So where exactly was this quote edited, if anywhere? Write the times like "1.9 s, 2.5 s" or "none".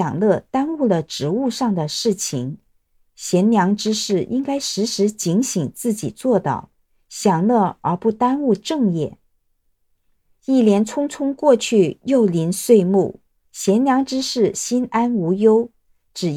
10.4 s, 13.5 s